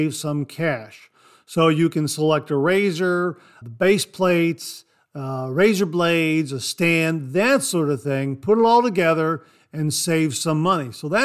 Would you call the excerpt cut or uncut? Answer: cut